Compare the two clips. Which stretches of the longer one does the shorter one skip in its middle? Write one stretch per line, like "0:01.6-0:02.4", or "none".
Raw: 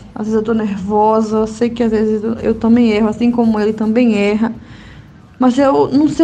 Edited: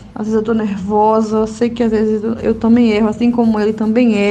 none